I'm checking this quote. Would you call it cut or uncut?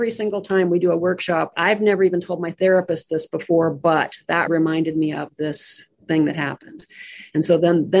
cut